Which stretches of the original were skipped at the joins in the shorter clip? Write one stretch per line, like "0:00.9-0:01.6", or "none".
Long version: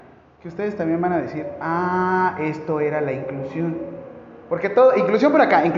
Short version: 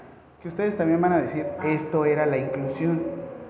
0:01.6-0:02.3